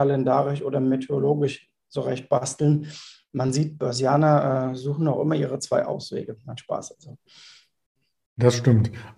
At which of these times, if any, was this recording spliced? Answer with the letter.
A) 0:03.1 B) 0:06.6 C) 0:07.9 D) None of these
D